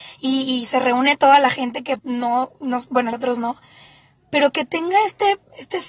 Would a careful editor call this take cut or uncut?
cut